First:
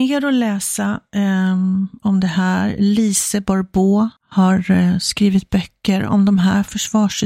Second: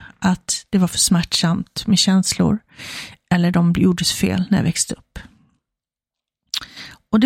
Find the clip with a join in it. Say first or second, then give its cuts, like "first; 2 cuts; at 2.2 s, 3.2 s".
first; 1 cut; at 4.2 s